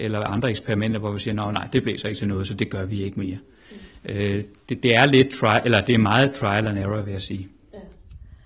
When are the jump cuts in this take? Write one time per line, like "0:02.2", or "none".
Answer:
none